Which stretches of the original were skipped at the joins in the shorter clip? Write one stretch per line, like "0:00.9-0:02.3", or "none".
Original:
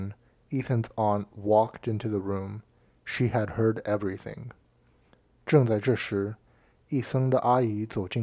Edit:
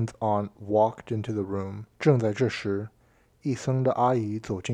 0:02.7-0:05.4